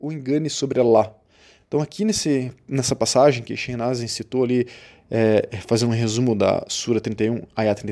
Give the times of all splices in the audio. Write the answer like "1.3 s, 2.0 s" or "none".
none